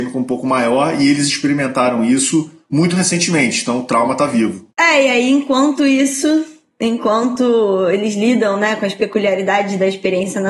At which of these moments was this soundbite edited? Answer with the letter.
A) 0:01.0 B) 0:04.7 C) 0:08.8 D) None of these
B